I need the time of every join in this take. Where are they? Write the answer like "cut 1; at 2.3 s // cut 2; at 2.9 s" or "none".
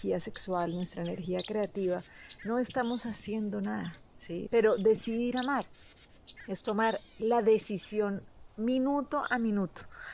cut 1; at 4.5 s